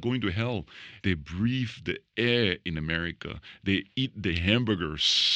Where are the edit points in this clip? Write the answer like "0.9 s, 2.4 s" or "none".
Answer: 1.0 s

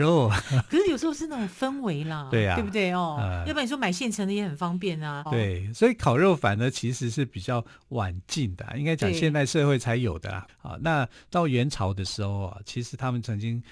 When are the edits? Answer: 5.3 s, 10.5 s

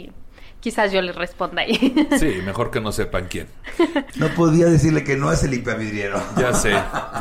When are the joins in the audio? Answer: 4.1 s

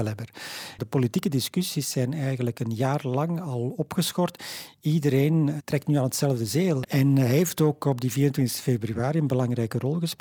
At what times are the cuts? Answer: 5.6 s, 6.8 s

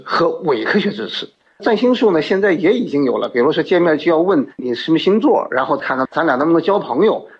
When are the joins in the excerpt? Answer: none

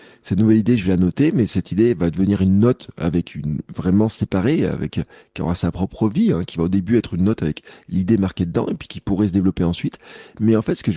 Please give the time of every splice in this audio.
none

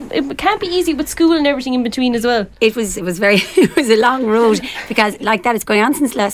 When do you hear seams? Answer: 2.9 s

